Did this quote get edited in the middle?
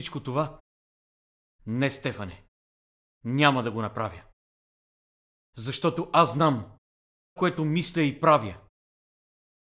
yes; 1 cut; at 7.4 s

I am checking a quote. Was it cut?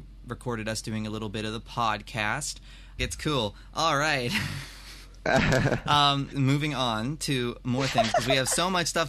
yes; 2 cuts; at 3.0 s, 6.3 s

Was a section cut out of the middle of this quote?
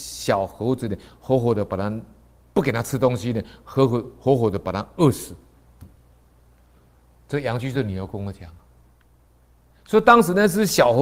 no; 0 cuts

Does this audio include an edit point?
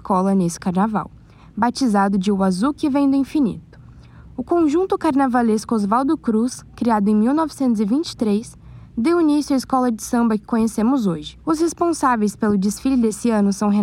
yes; 1 cut; at 11.4 s

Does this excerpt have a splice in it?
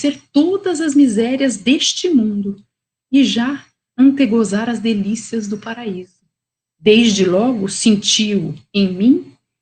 no; 0 cuts

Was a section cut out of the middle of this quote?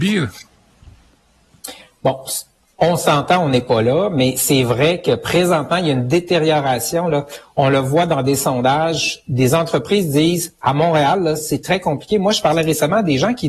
no; 0 cuts

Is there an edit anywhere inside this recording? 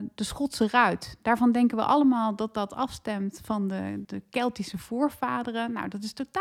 yes; 1 cut; at 4.0 s

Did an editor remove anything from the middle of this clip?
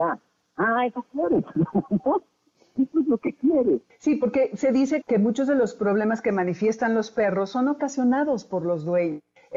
yes; 2 cuts; at 3.9 s, 5.0 s

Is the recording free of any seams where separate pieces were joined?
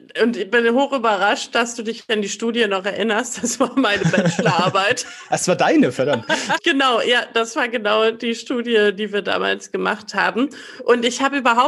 no; 1 cut; at 6.6 s

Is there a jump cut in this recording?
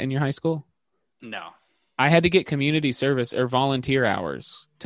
no; 0 cuts

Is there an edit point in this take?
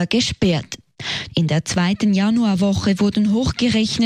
yes; 1 cut; at 1.3 s

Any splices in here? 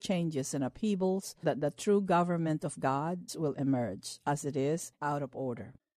yes; 2 cuts; at 1.4 s, 3.3 s

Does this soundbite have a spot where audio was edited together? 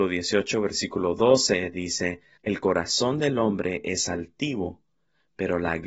yes; 1 cut; at 2.4 s

